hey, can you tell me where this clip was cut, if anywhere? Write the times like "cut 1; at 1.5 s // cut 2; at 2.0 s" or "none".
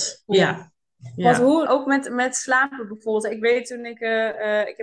cut 1; at 1.7 s

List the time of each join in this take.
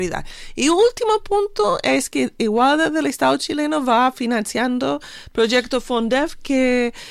none

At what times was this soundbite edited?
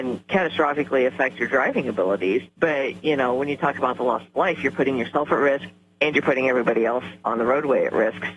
cut 1; at 2.5 s

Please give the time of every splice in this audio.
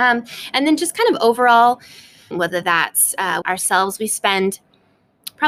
cut 1; at 2.3 s // cut 2; at 3.4 s

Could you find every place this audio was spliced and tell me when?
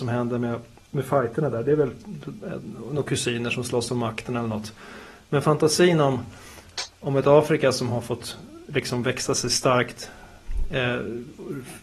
none

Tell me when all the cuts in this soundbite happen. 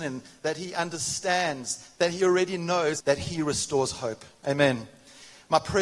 cut 1; at 2.0 s // cut 2; at 3.0 s

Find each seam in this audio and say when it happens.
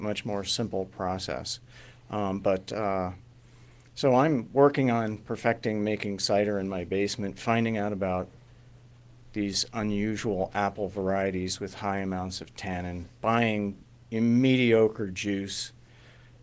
none

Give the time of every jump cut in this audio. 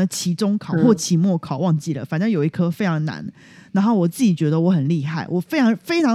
none

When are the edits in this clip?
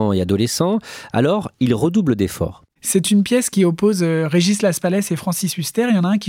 cut 1; at 2.7 s

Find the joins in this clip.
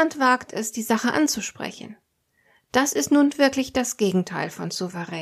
none

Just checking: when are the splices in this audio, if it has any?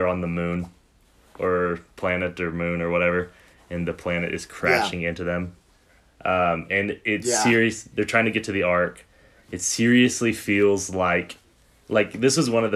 none

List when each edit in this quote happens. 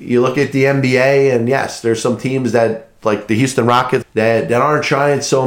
cut 1; at 4.0 s

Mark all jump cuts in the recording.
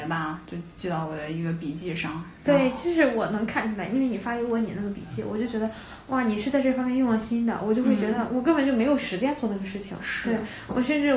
none

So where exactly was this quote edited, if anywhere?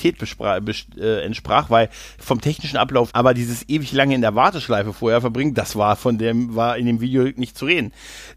cut 1; at 3.1 s

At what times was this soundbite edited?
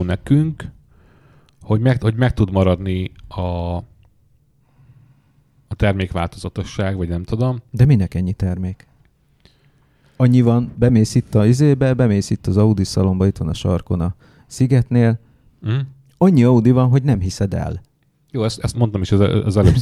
cut 1; at 18.7 s

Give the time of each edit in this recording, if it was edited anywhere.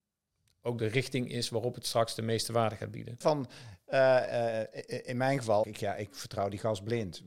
cut 1; at 3.2 s // cut 2; at 5.6 s

